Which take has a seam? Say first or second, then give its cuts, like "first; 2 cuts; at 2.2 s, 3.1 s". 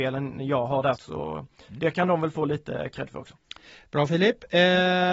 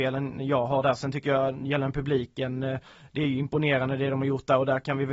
first; 1 cut; at 1.0 s